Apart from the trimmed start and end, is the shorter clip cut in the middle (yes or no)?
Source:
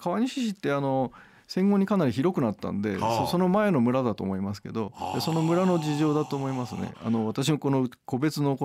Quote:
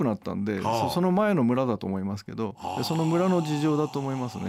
no